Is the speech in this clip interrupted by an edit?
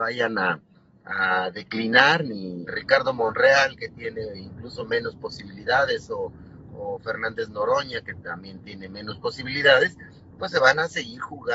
yes; 1 cut; at 2.7 s

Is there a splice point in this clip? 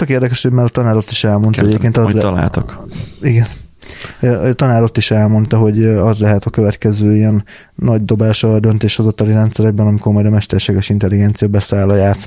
no; 0 cuts

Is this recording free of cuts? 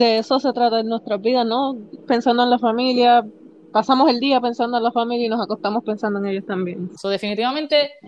no; 2 cuts; at 2.0 s, 7.0 s

